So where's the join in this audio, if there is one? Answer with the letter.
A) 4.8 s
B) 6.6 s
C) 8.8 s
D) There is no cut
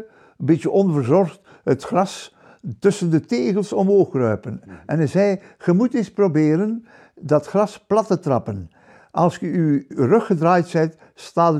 D